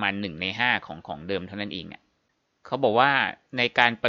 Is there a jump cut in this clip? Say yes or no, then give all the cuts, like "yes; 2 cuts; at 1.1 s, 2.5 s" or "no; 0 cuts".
no; 0 cuts